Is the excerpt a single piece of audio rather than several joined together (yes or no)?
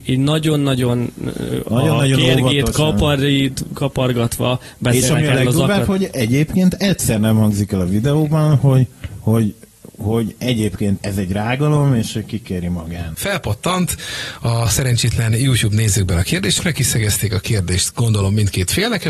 no